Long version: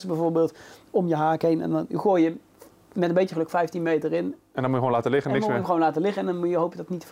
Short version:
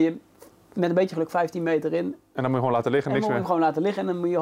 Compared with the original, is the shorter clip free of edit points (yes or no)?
yes